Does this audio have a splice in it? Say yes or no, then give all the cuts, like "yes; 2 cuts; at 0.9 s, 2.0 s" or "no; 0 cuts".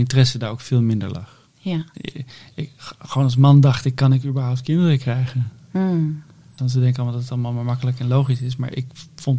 yes; 2 cuts; at 1.9 s, 6.6 s